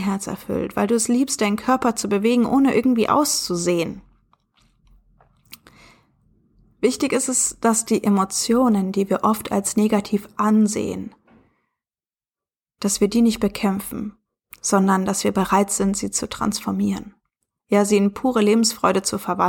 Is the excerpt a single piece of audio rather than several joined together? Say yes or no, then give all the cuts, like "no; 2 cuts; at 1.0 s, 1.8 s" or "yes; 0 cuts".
yes; 0 cuts